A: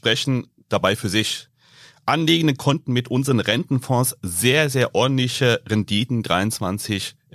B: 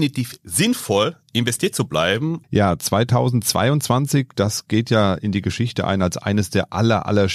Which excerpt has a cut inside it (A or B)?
B